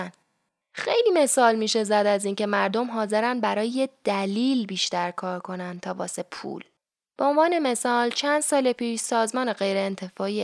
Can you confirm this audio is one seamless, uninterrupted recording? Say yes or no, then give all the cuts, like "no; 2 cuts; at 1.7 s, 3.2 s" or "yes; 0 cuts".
yes; 0 cuts